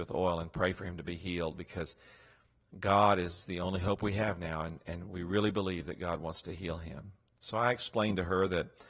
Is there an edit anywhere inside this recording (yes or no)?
no